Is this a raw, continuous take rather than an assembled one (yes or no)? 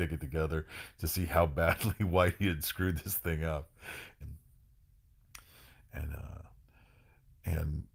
no